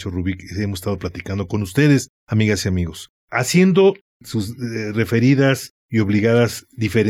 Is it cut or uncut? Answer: uncut